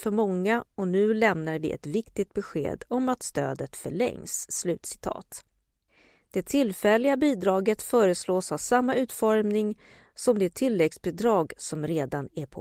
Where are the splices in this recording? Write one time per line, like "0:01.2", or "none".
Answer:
none